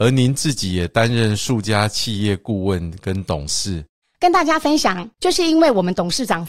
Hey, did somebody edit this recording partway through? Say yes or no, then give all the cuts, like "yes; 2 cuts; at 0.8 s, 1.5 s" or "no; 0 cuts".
yes; 2 cuts; at 4.0 s, 5.2 s